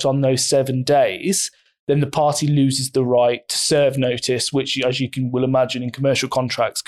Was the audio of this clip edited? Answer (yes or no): no